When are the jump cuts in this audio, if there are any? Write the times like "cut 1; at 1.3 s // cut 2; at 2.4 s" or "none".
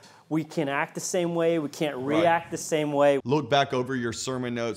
cut 1; at 3.2 s